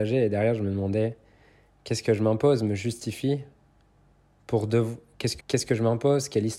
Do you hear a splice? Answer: yes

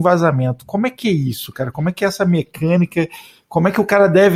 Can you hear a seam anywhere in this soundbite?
no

